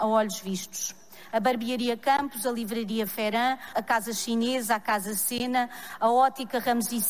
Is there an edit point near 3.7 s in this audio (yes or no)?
yes